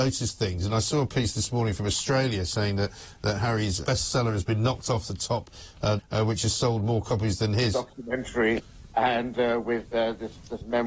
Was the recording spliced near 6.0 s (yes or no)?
yes